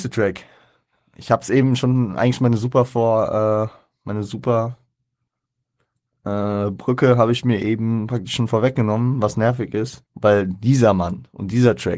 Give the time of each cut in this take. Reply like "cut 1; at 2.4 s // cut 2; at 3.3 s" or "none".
cut 1; at 10.1 s

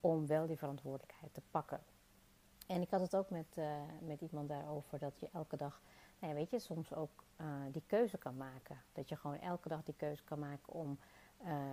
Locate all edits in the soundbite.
none

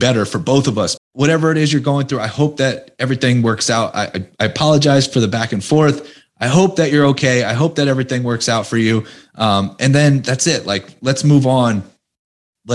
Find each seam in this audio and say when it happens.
cut 1; at 1.0 s

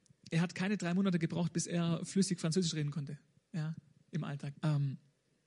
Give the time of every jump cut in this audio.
cut 1; at 4.6 s

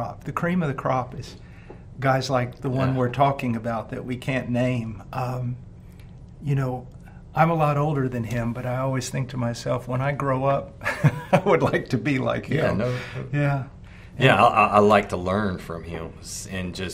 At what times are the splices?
none

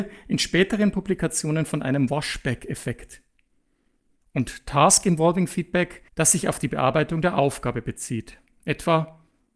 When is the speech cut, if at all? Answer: cut 1; at 4.2 s // cut 2; at 6.1 s

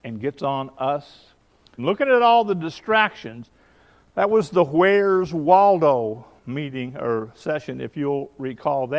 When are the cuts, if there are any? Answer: cut 1; at 1.8 s

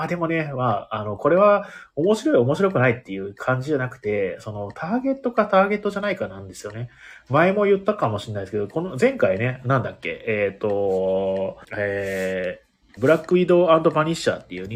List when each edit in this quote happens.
cut 1; at 11.6 s // cut 2; at 13.0 s

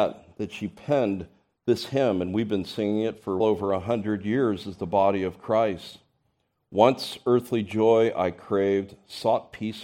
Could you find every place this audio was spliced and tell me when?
cut 1; at 3.4 s

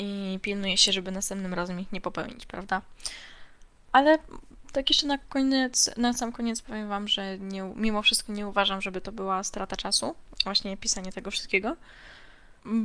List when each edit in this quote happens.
cut 1; at 3.9 s

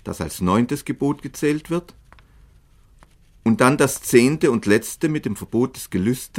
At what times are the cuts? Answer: none

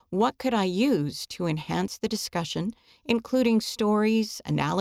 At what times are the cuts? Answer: none

